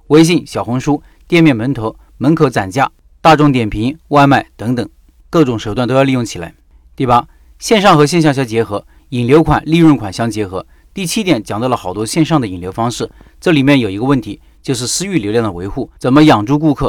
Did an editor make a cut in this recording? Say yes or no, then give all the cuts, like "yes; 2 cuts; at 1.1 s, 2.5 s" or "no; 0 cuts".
yes; 1 cut; at 16.0 s